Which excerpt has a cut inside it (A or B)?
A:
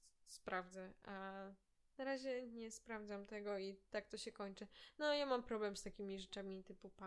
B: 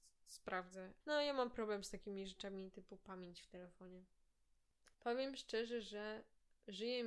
B